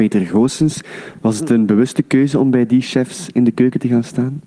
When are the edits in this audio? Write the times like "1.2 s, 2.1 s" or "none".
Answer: none